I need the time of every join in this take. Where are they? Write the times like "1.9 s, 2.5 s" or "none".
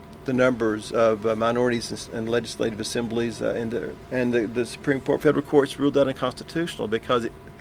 4.1 s

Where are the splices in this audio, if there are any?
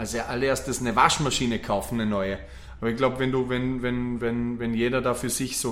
2.8 s

